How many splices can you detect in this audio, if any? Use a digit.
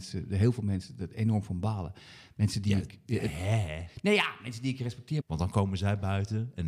1